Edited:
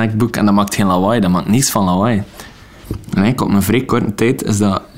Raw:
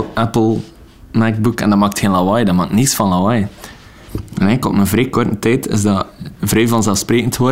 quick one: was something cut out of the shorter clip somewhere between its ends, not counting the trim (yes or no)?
no